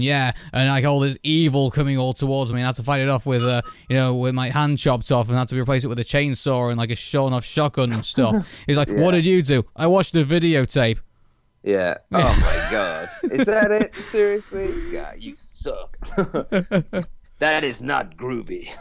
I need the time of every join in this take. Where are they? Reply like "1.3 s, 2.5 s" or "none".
none